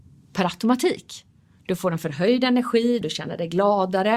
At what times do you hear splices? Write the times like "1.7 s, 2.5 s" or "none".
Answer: 3.0 s